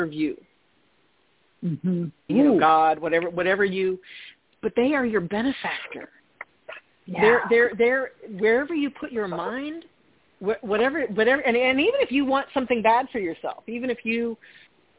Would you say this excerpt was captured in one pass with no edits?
no; 1 cut; at 2.3 s

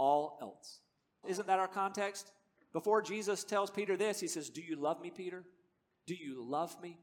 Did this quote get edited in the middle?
yes; 1 cut; at 1.2 s

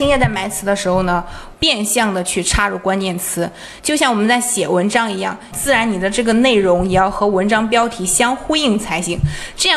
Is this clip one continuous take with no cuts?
no; 3 cuts; at 1.5 s, 3.8 s, 5.5 s

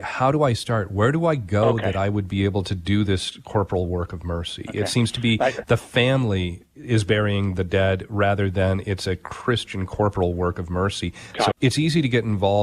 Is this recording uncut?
no; 1 cut; at 11.5 s

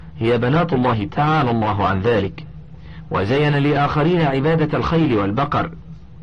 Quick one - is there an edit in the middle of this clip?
yes; 1 cut; at 1.1 s

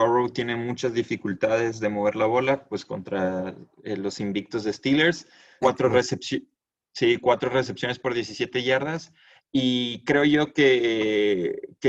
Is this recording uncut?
no; 1 cut; at 5.6 s

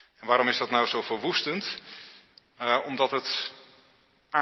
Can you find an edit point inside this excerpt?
no; 0 cuts

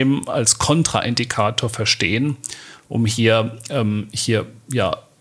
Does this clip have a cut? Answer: no; 0 cuts

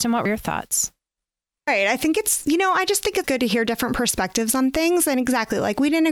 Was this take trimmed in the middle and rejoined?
yes; 1 cut; at 3.2 s

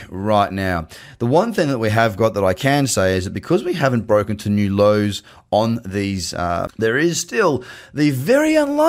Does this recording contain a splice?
yes; 1 cut; at 6.7 s

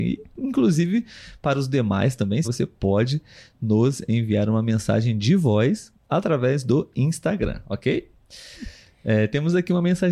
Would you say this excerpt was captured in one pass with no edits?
no; 2 cuts; at 2.4 s, 8.5 s

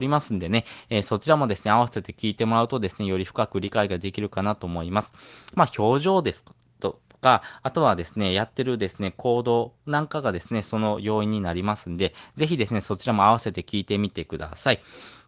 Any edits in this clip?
no; 0 cuts

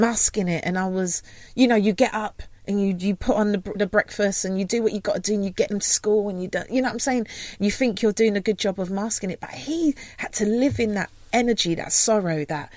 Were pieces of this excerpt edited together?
no; 0 cuts

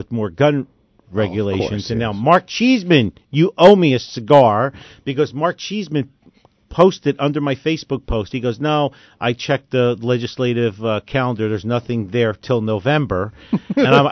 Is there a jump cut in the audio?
no; 0 cuts

